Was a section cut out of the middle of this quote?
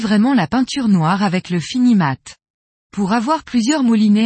no; 0 cuts

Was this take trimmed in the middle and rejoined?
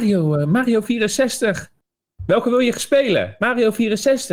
no; 0 cuts

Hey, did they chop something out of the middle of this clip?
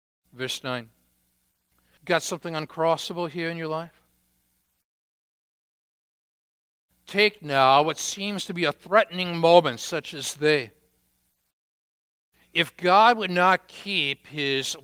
yes; 1 cut; at 2.0 s

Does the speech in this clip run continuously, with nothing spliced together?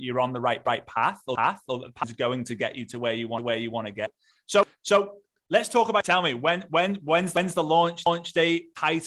no; 1 cut; at 4.4 s

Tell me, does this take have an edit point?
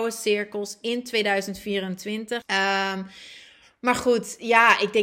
yes; 1 cut; at 2.4 s

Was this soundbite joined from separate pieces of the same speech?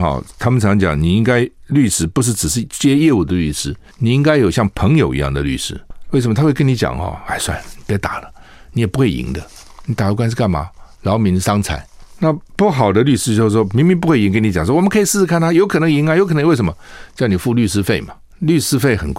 no; 0 cuts

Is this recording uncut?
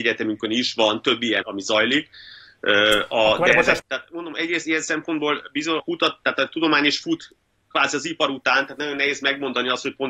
no; 3 cuts; at 1.4 s, 3.8 s, 5.8 s

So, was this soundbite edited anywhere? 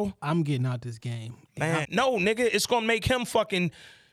yes; 1 cut; at 1.8 s

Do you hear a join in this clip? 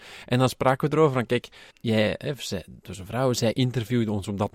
yes; 1 cut; at 1.7 s

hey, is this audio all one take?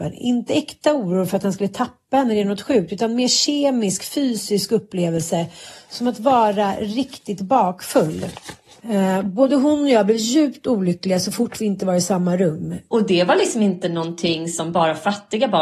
no; 1 cut; at 12.9 s

